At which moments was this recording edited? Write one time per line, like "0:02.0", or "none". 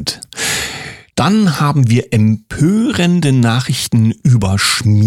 none